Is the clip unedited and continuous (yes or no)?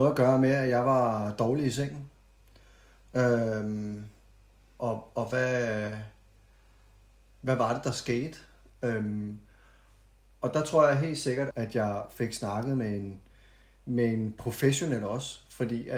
no